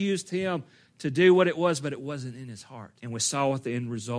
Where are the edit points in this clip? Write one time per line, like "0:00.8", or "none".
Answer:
0:03.0

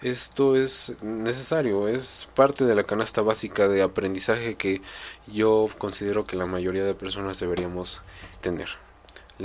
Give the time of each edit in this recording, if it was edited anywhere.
0:08.4

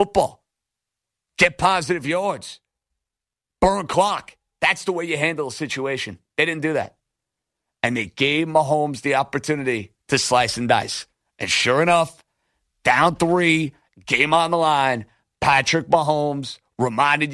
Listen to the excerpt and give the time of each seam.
0:10.0

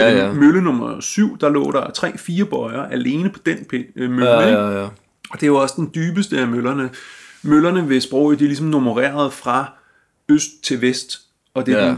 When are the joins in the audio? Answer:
none

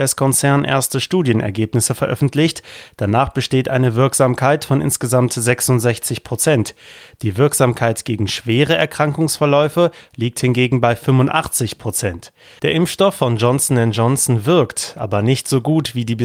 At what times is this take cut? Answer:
0:10.1
0:12.6

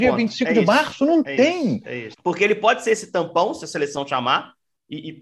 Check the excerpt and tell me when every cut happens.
0:02.1

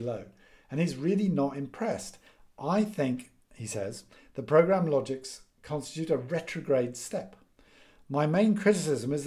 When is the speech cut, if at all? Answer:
none

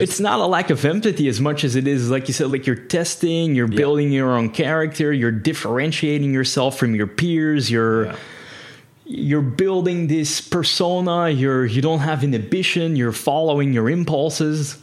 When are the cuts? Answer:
none

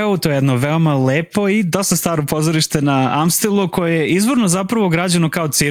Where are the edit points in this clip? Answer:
none

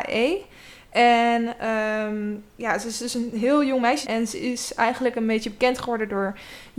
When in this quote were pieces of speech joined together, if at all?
0:04.0

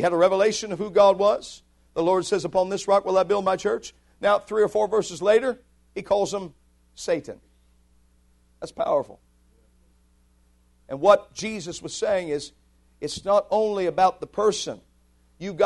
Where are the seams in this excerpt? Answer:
none

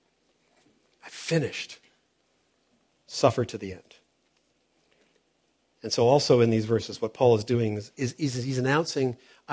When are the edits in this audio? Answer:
0:02.9

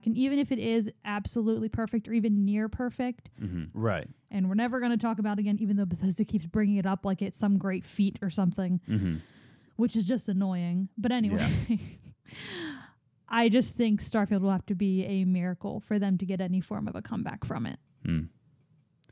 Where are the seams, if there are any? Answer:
0:03.7

